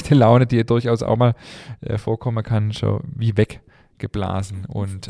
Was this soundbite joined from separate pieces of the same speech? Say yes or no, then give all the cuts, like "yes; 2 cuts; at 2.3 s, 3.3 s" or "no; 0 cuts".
no; 0 cuts